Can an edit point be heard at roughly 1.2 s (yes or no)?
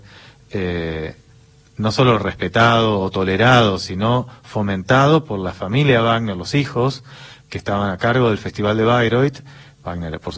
no